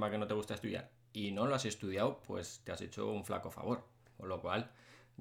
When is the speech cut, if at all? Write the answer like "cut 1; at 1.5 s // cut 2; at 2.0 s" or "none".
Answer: none

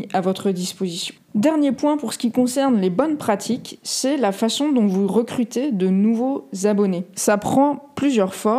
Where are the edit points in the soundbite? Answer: cut 1; at 7.1 s

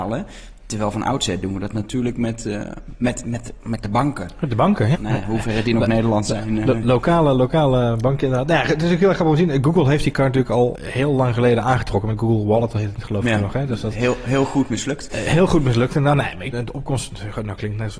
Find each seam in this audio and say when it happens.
cut 1; at 4.9 s // cut 2; at 10.7 s // cut 3; at 16.5 s

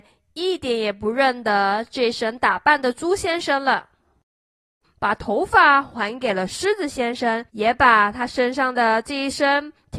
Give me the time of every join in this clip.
cut 1; at 4.8 s // cut 2; at 7.5 s

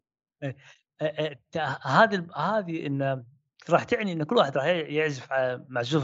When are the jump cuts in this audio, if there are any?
none

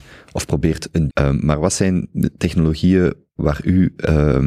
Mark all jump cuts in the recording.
cut 1; at 1.1 s

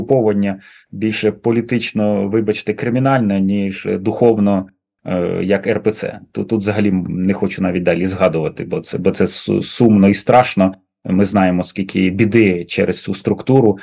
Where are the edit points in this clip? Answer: none

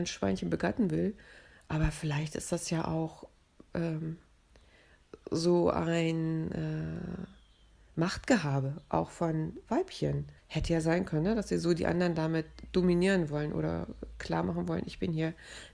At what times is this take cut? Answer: cut 1; at 10.4 s

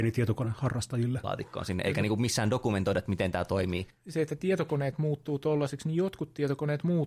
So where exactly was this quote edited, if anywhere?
cut 1; at 1.2 s

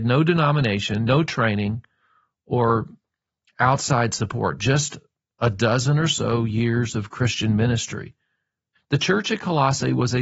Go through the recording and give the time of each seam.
cut 1; at 8.7 s

